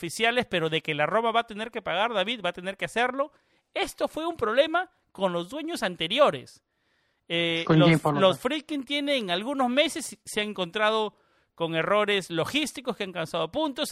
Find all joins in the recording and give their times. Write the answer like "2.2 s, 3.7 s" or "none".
none